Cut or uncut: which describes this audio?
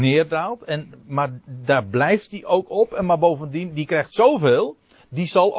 uncut